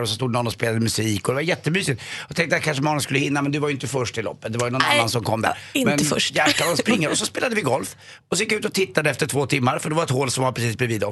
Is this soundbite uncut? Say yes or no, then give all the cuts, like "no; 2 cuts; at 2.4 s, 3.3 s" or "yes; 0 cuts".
yes; 0 cuts